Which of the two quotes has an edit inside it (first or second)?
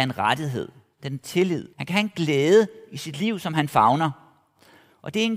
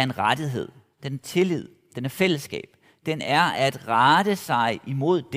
first